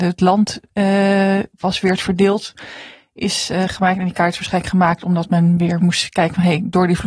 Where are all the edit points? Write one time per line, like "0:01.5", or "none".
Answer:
none